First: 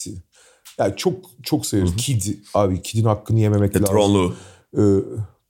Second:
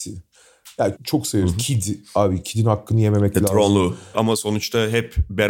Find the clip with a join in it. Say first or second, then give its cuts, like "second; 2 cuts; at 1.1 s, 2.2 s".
second; 2 cuts; at 1.0 s, 4.1 s